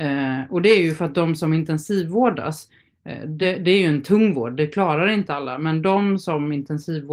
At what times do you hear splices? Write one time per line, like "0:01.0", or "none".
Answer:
none